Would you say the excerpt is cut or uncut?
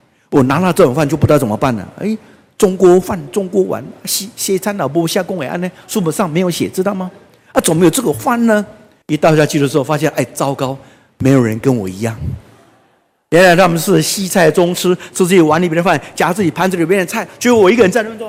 cut